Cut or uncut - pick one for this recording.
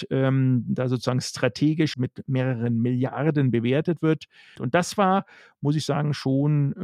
cut